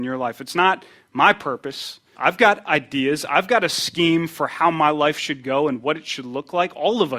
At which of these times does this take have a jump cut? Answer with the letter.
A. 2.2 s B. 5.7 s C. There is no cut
A